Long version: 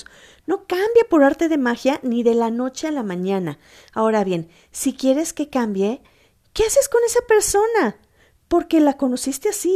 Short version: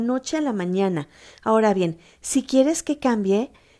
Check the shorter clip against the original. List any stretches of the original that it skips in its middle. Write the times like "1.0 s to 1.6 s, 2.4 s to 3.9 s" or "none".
none